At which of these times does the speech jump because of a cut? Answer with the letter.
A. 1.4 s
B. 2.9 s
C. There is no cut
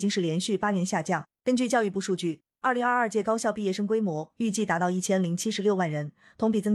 A